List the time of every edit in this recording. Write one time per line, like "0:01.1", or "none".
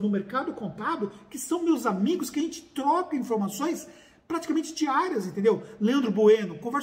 none